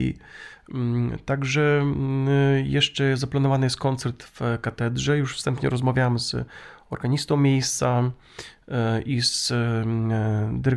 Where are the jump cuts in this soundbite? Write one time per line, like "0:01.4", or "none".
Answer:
none